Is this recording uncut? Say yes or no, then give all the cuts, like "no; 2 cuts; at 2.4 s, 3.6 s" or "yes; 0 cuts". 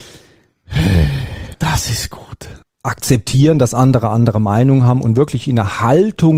no; 2 cuts; at 1.5 s, 2.6 s